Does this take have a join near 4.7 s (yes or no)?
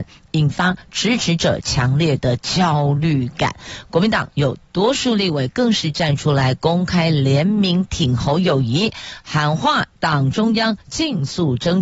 no